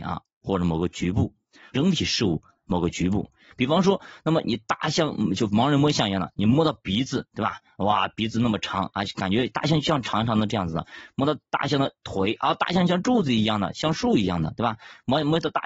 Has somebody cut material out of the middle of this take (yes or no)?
yes